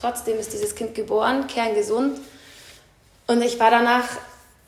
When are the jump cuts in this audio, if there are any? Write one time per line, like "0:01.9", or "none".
none